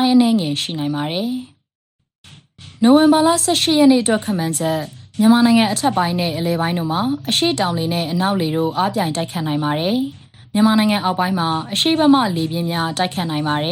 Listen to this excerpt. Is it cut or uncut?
uncut